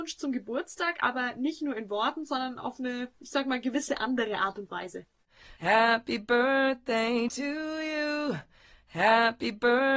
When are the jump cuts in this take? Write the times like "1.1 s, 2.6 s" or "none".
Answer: none